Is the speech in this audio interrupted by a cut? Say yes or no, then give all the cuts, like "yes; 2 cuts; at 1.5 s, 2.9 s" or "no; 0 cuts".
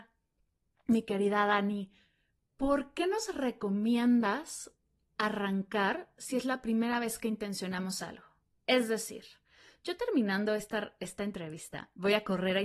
no; 0 cuts